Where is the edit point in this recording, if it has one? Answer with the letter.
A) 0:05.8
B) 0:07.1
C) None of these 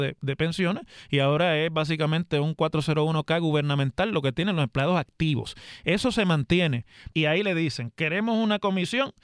B